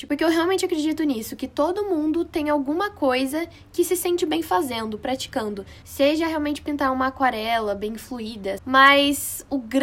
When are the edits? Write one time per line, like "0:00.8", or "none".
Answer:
0:05.8
0:08.6